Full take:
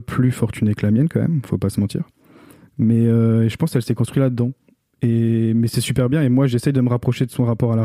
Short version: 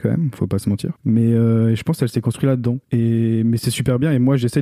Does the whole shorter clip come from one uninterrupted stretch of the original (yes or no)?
no